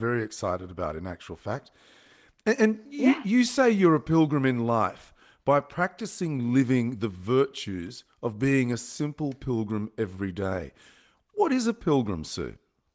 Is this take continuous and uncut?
yes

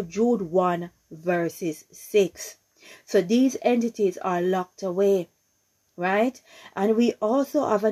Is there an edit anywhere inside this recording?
no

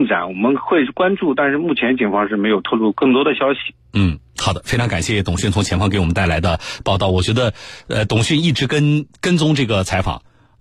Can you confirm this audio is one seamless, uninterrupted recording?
yes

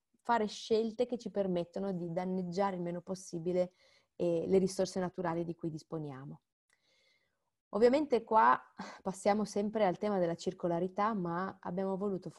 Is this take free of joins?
yes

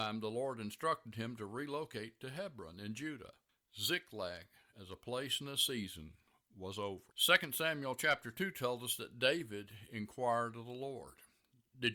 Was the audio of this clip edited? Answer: yes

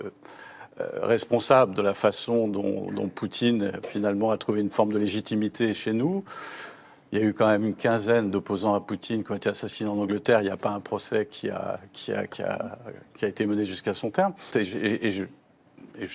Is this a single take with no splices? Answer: no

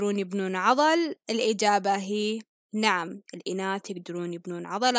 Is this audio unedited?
no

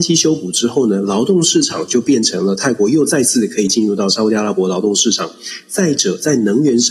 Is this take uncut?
yes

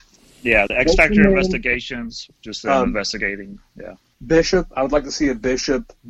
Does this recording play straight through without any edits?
no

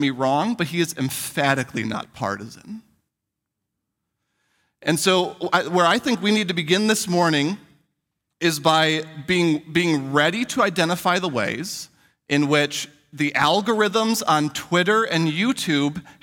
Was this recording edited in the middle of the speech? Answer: no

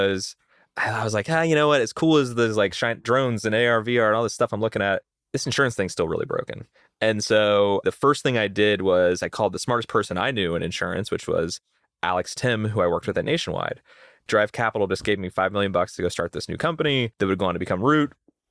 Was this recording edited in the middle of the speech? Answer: yes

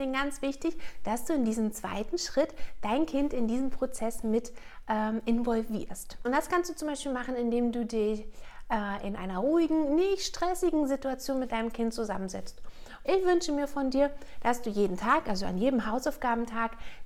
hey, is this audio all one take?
no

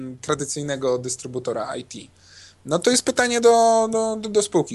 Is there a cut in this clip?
no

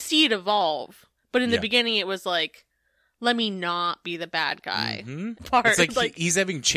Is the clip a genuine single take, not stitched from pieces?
no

